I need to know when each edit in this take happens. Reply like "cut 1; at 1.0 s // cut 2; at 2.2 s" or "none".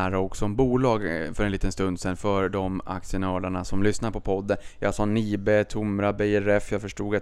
none